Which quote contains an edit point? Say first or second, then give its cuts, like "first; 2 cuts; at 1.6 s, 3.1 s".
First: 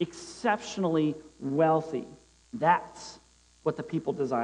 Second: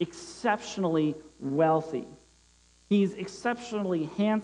first; 1 cut; at 2.4 s